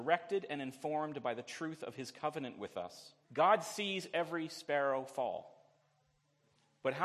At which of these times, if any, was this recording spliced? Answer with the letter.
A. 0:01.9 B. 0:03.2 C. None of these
B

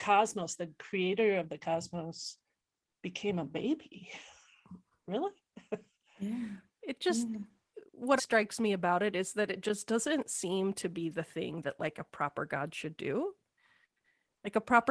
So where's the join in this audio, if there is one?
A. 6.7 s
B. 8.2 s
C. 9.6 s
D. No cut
B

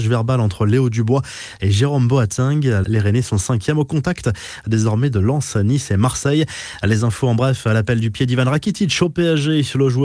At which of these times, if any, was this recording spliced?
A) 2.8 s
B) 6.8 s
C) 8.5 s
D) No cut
A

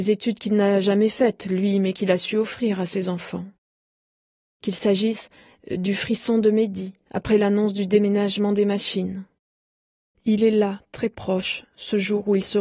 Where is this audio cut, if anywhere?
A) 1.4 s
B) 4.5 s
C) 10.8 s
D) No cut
D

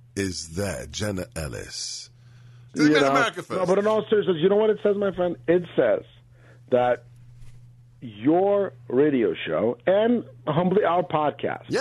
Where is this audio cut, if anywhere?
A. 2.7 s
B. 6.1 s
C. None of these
A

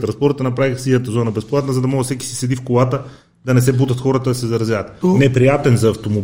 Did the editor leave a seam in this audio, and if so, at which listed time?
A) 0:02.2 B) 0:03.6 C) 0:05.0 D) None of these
C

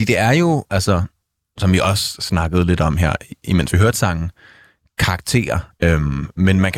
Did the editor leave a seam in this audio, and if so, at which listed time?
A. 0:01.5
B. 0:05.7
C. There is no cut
B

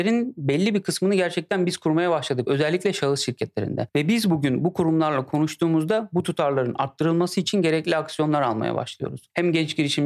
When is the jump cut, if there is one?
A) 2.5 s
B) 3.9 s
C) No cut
C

